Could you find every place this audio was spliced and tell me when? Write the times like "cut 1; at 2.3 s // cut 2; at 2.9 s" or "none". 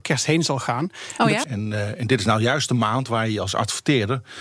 cut 1; at 1.4 s